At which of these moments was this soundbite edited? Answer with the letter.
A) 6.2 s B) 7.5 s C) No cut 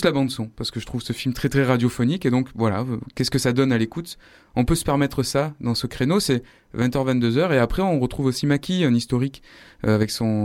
C